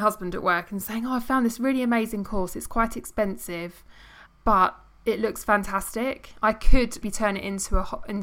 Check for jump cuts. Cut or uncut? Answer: cut